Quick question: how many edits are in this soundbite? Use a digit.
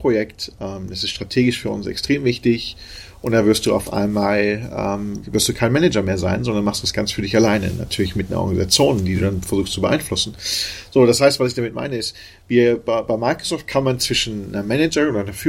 1